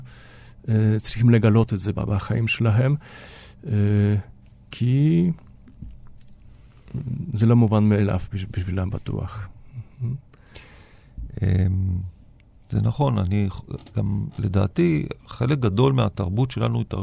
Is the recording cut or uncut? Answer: cut